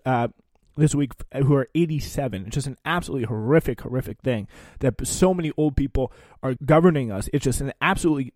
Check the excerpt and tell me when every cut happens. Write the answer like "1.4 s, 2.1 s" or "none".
6.6 s